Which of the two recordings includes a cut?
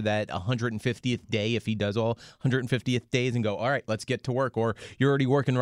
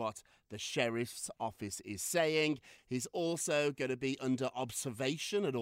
second; 1 cut; at 2.8 s

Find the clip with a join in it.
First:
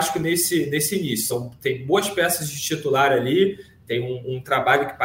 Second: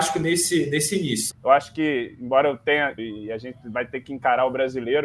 second; 2 cuts; at 1.3 s, 3.0 s

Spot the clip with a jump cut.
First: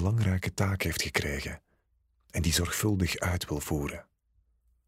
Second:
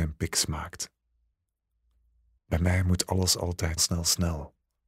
second; 2 cuts; at 2.4 s, 3.8 s

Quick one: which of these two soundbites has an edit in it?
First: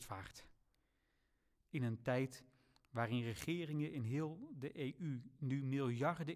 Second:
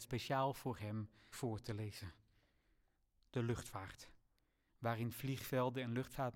second; 2 cuts; at 1.3 s, 4.7 s

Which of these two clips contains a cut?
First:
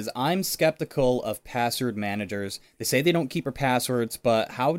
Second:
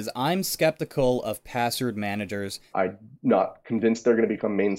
second; 1 cut; at 2.7 s

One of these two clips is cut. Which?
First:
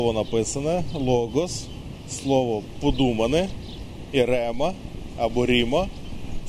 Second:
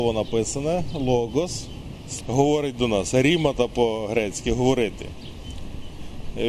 second; 1 cut; at 2.2 s

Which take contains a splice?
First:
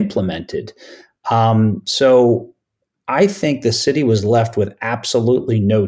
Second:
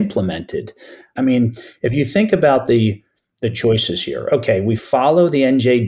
second; 1 cut; at 1.2 s

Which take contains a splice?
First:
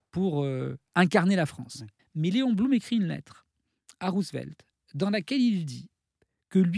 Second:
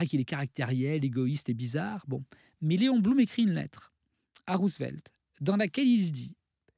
first; 1 cut; at 2.0 s

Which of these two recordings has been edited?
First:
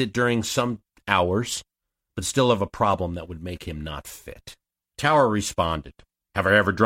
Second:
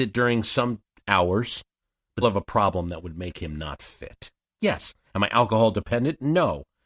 second; 2 cuts; at 2.2 s, 4.6 s

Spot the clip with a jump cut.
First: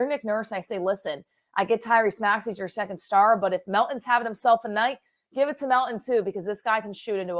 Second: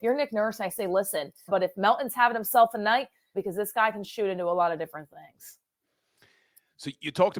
second; 2 cuts; at 1.5 s, 3.3 s

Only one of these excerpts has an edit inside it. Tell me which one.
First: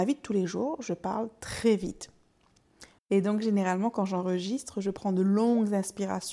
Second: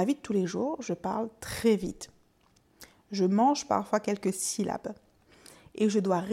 first; 1 cut; at 3.0 s

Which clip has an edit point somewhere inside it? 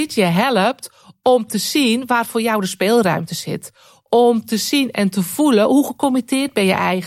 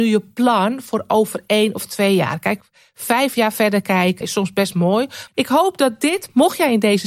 second; 2 cuts; at 4.2 s, 5.3 s

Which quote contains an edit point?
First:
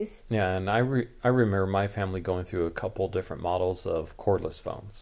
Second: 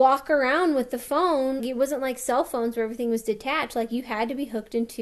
second; 1 cut; at 1.6 s

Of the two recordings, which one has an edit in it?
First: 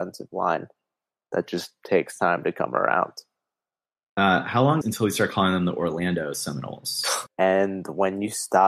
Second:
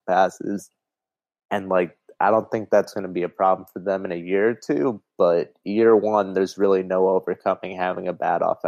first; 2 cuts; at 4.8 s, 7.3 s

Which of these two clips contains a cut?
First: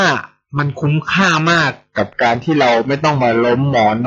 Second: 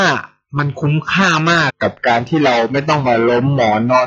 second; 1 cut; at 1.7 s

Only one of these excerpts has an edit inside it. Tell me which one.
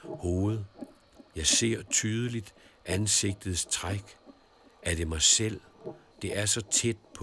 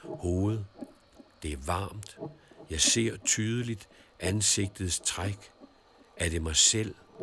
first; 2 cuts; at 1.3 s, 6.1 s

